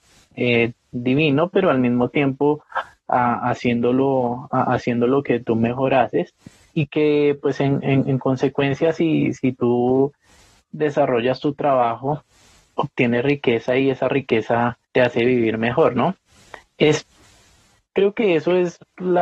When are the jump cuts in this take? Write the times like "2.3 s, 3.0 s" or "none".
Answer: 14.8 s